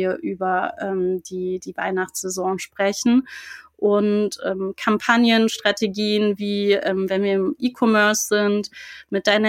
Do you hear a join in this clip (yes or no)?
no